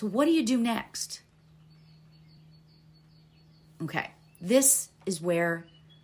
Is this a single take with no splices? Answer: yes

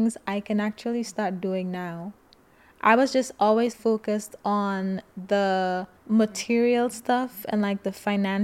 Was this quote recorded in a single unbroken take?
no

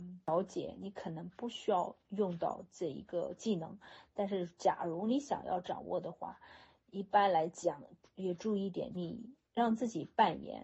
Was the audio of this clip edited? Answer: no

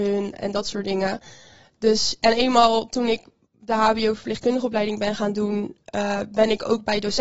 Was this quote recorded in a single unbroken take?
yes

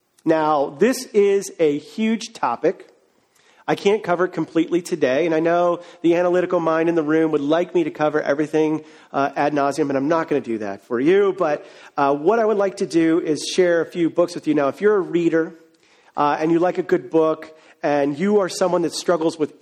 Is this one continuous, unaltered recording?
yes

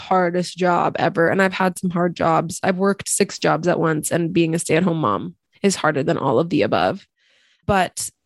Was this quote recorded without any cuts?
yes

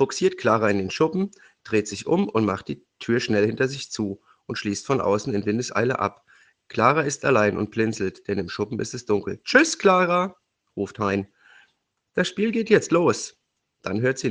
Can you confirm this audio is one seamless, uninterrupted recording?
yes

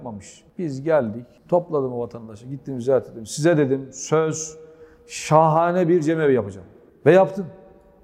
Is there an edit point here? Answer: no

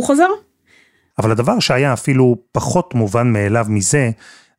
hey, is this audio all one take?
no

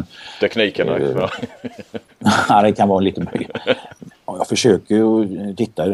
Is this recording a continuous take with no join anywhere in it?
no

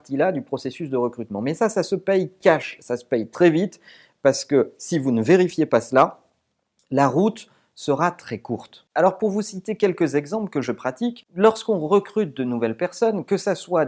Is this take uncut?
yes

